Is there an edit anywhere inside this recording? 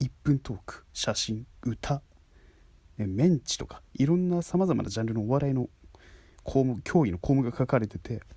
no; 0 cuts

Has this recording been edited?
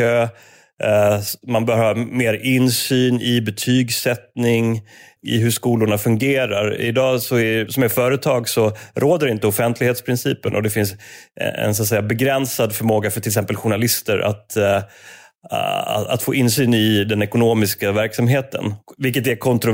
yes; 2 cuts; at 5.2 s, 7.7 s

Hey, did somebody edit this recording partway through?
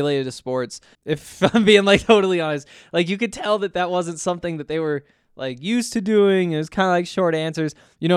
yes; 1 cut; at 0.9 s

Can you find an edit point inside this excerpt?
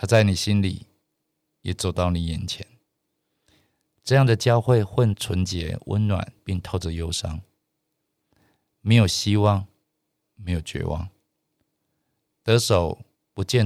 no; 0 cuts

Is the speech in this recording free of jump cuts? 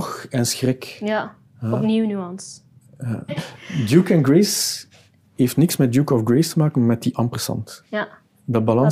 no; 1 cut; at 3.3 s

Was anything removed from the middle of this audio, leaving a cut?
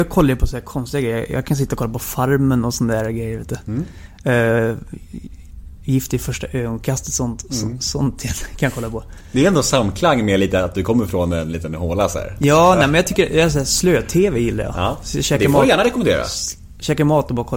no; 0 cuts

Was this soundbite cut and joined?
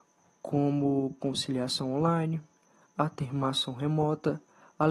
no; 0 cuts

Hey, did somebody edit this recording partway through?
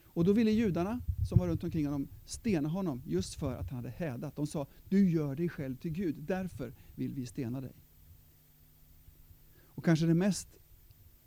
no; 0 cuts

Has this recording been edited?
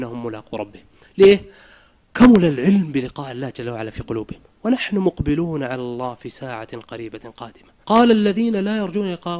yes; 2 cuts; at 1.0 s, 7.8 s

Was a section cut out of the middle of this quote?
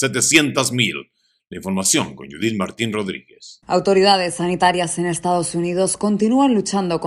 no; 0 cuts

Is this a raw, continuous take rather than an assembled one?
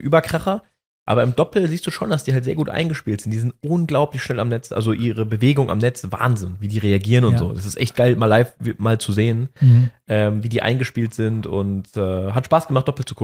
yes; 0 cuts

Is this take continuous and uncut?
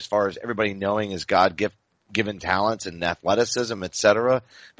yes; 0 cuts

